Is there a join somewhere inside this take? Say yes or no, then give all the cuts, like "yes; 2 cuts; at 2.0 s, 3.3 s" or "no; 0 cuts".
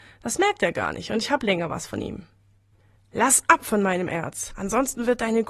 yes; 1 cut; at 3.0 s